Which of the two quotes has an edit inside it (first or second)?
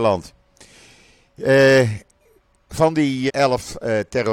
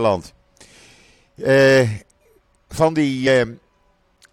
first